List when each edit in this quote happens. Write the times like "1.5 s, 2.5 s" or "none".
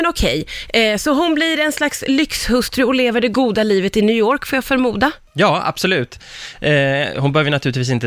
none